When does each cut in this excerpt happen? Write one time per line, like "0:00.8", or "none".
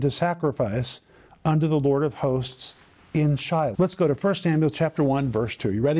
0:03.7